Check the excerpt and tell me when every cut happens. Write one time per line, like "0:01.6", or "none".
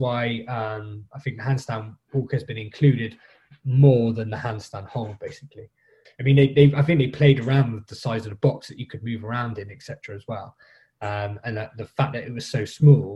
0:06.1